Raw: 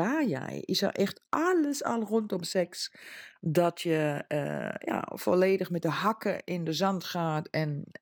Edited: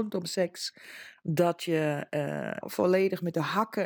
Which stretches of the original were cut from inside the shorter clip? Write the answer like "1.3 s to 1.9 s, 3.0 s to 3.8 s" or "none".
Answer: 4.8 s to 5.1 s